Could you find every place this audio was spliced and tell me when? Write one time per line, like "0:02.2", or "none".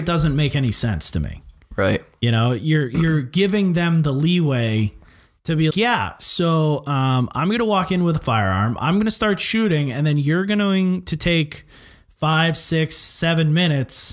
0:05.7